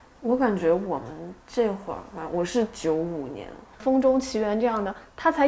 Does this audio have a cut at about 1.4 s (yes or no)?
yes